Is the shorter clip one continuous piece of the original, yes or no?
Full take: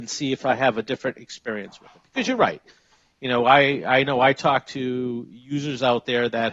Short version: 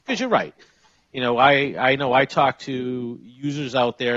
yes